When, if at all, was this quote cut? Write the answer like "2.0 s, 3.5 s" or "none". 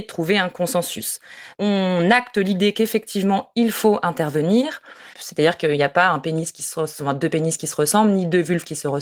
5.1 s